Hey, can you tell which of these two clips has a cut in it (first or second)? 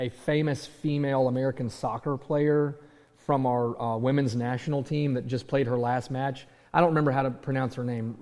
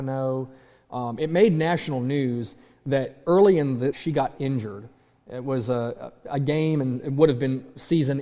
second